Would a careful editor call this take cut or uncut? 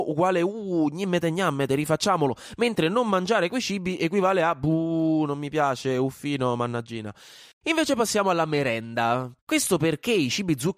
cut